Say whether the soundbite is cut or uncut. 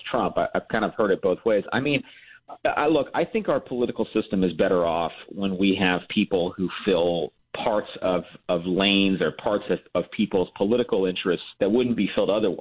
cut